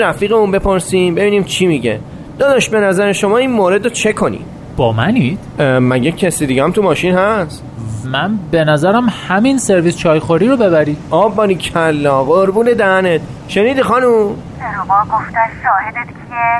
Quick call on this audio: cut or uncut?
cut